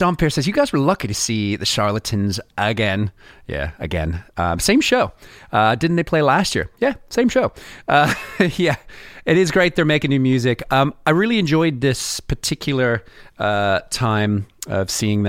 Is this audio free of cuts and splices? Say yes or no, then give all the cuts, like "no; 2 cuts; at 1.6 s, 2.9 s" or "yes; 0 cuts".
yes; 0 cuts